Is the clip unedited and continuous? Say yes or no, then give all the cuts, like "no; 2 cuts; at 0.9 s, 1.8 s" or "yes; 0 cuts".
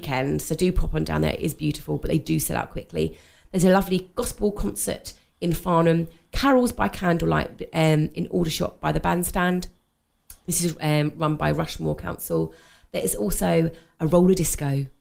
yes; 0 cuts